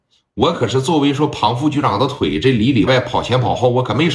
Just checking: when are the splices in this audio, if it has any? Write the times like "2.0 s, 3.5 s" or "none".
2.9 s